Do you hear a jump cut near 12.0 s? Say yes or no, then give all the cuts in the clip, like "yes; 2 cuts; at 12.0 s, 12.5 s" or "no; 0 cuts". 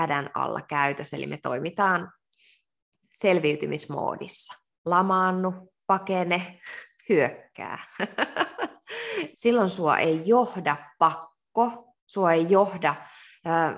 yes; 3 cuts; at 4.8 s, 9.3 s, 12.0 s